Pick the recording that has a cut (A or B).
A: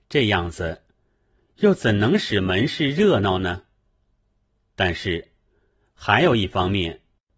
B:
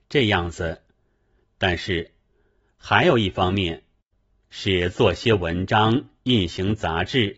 B